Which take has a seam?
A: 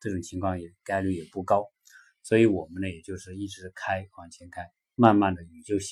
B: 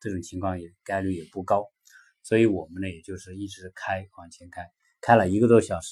A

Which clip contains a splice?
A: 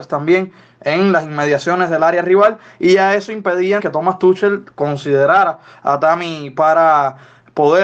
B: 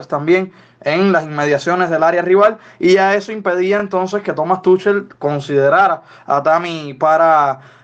A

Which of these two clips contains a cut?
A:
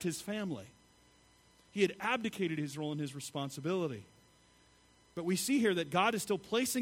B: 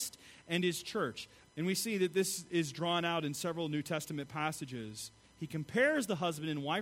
B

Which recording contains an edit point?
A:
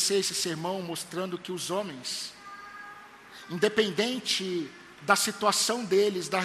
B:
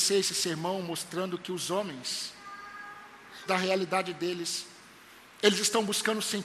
B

